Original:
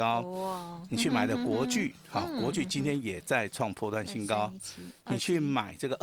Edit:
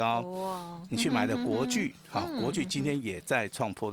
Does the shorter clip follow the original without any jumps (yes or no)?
yes